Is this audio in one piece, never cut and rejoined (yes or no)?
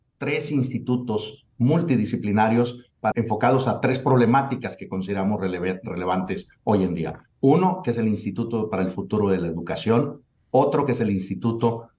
no